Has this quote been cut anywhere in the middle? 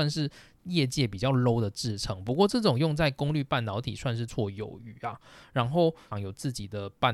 yes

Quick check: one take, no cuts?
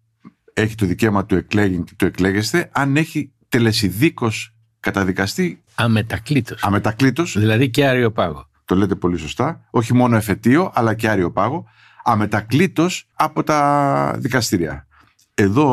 no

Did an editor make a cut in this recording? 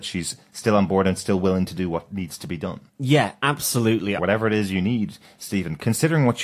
yes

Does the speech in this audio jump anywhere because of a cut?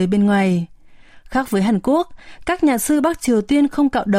no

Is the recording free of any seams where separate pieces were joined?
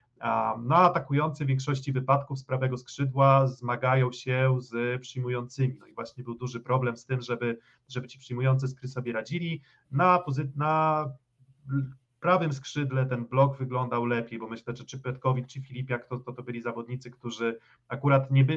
yes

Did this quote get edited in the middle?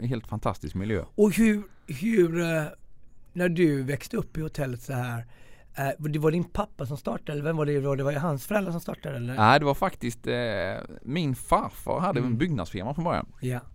no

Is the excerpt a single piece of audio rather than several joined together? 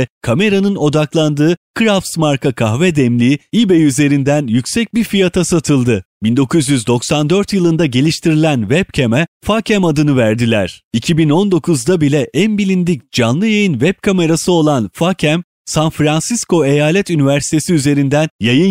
yes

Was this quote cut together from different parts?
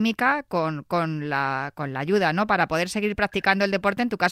no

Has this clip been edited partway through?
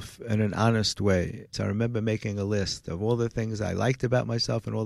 yes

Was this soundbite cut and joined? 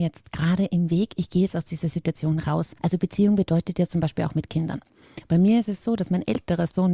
yes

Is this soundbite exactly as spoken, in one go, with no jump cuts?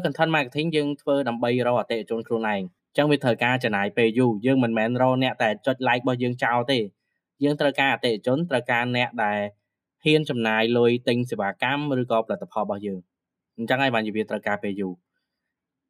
yes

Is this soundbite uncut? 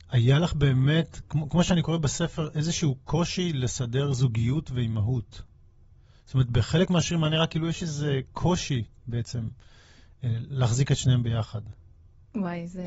yes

